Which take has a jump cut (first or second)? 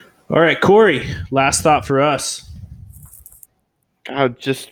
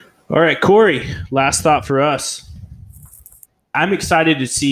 second